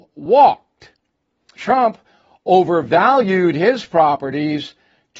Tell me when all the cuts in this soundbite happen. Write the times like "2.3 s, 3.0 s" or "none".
1.6 s